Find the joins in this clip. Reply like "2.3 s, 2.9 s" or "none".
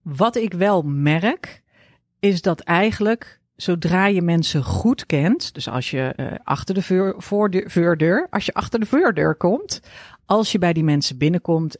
6.2 s